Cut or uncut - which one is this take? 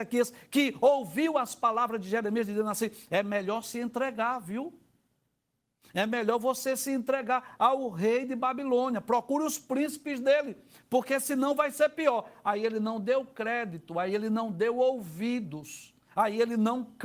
uncut